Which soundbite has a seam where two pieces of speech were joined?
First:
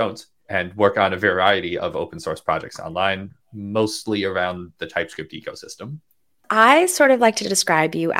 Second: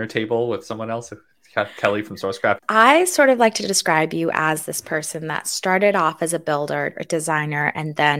second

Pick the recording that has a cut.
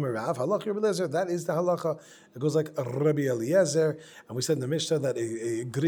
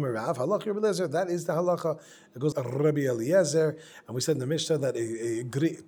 second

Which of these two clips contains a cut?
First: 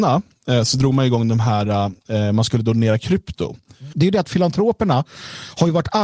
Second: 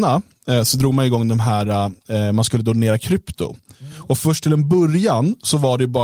first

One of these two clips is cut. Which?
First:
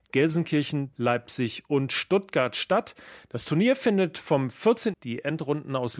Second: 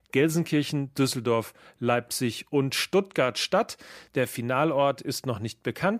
first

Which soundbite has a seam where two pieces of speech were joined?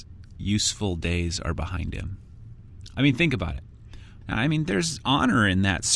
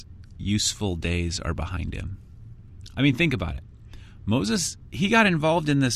first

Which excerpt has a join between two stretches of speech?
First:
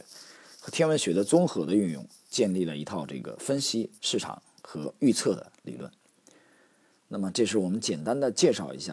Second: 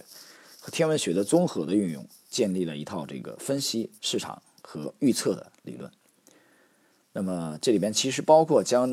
first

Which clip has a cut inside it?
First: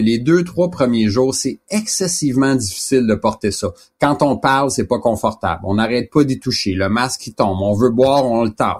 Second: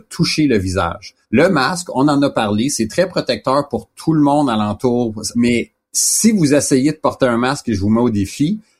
second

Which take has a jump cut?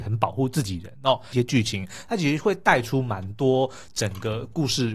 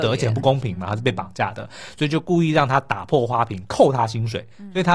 first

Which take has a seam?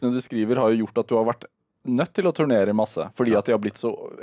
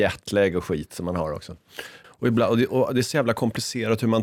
second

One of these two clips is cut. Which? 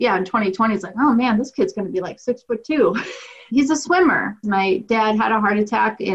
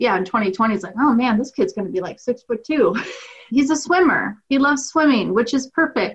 first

